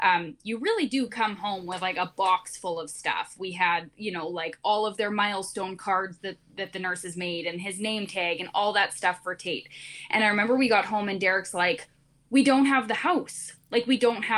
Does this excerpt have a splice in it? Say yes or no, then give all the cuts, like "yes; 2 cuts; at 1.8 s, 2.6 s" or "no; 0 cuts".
no; 0 cuts